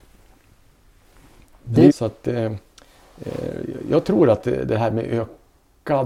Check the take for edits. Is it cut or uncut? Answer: cut